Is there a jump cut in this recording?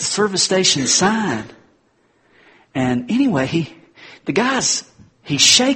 no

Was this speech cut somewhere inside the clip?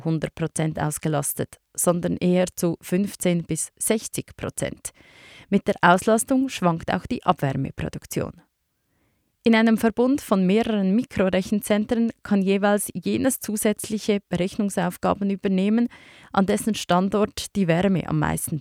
no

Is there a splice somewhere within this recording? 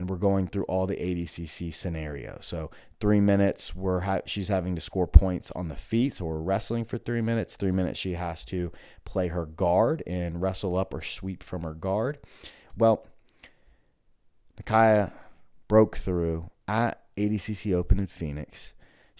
yes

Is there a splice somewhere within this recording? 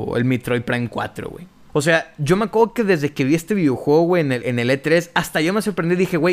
yes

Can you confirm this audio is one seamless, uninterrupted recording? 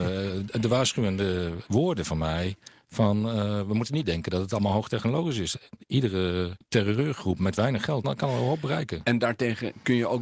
no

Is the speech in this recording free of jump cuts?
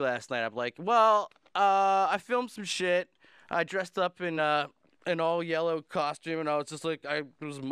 yes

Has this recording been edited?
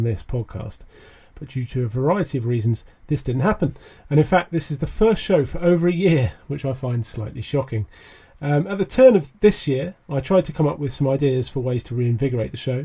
no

